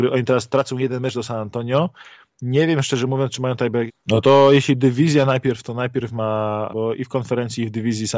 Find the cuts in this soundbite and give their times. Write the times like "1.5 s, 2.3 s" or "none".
3.9 s, 6.7 s